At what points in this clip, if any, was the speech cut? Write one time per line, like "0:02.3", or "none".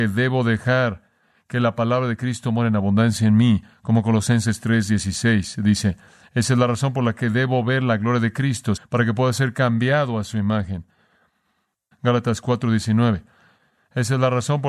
0:08.8
0:11.9